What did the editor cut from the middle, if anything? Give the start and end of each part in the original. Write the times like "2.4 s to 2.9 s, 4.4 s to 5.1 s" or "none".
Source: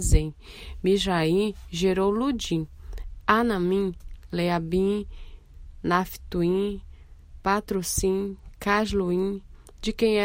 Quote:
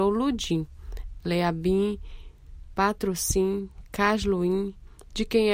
3.2 s to 4.3 s, 5.8 s to 7.4 s